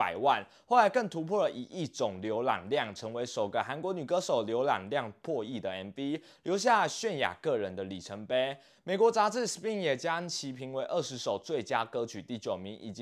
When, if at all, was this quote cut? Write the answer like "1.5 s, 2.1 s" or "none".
none